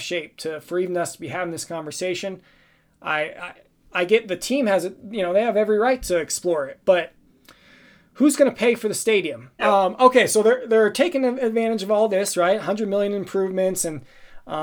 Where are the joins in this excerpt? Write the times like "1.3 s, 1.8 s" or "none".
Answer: 9.6 s